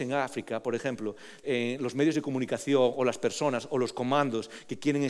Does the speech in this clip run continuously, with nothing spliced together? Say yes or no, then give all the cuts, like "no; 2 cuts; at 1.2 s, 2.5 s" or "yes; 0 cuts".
no; 1 cut; at 1.4 s